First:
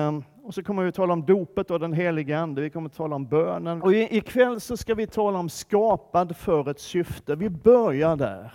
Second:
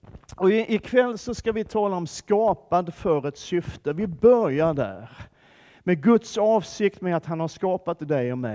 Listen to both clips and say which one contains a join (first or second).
first